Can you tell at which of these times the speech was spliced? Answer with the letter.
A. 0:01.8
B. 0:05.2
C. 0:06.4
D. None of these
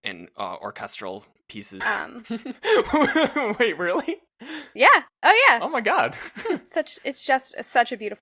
A